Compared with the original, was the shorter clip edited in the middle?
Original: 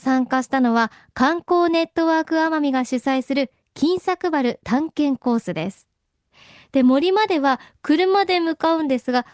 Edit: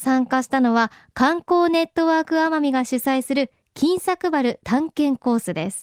no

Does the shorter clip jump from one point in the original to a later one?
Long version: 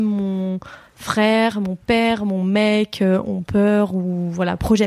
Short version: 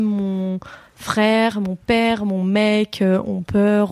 no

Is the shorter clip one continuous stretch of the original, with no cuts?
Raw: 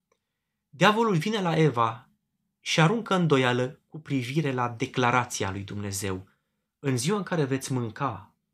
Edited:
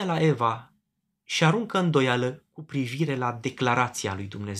yes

